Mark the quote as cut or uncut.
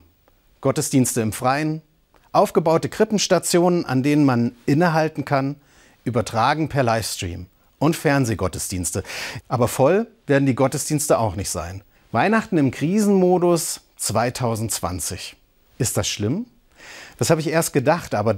cut